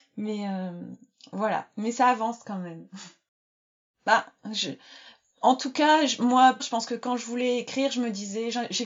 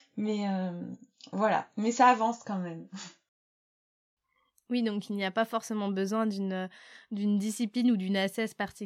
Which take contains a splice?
first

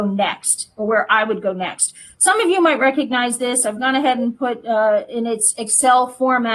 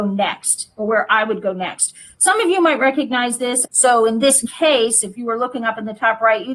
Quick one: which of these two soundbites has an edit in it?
second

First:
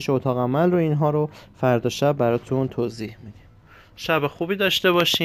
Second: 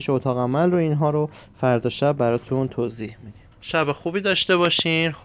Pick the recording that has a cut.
second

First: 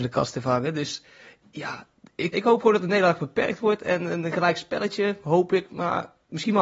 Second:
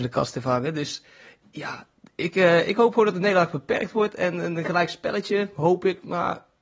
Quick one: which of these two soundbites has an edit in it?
first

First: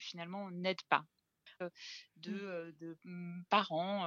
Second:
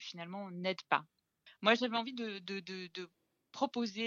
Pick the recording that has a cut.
first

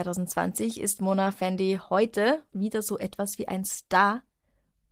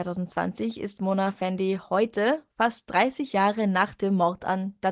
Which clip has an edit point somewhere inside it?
first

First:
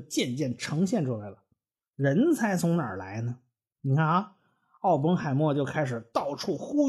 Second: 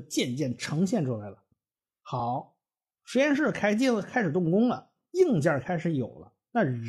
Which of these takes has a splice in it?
first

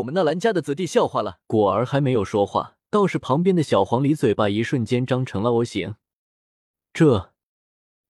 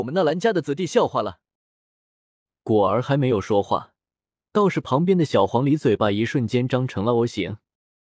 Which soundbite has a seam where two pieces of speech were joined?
first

